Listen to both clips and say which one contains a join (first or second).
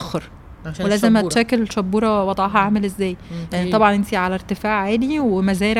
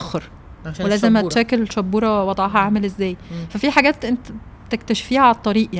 first